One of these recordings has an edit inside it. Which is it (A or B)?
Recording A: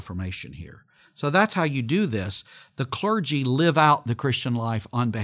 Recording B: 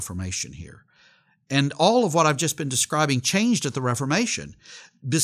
A